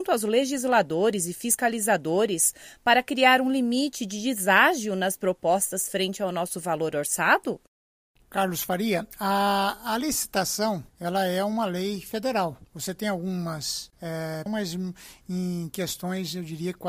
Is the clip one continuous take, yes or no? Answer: no